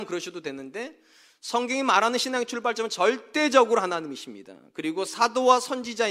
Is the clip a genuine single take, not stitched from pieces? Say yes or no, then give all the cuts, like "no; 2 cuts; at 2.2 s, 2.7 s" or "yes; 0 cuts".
yes; 0 cuts